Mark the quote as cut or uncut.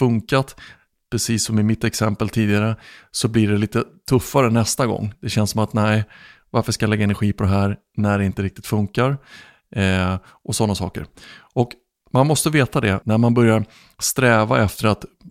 cut